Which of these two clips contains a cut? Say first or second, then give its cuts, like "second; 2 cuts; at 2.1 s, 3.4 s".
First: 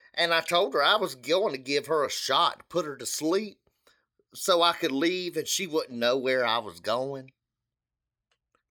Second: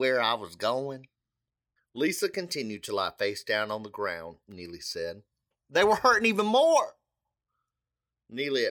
second; 2 cuts; at 1.8 s, 5.5 s